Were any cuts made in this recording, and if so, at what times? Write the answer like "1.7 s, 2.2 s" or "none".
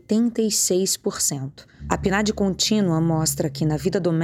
1.8 s